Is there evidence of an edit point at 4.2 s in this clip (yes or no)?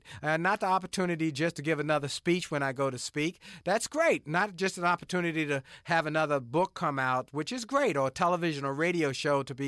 no